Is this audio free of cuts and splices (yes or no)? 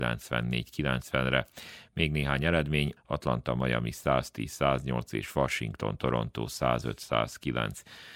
no